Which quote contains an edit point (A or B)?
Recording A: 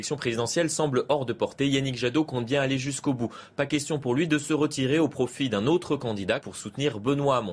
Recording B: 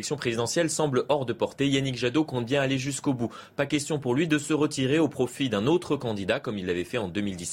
A